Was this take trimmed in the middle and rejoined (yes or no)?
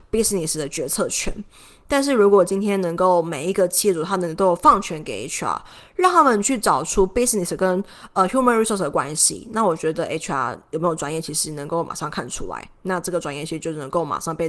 no